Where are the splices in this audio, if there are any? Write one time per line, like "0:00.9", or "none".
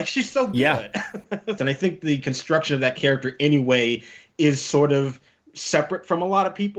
0:01.6